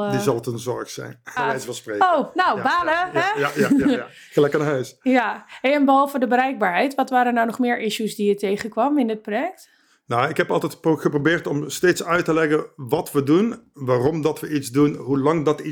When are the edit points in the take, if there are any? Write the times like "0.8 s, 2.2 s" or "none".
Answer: 1.4 s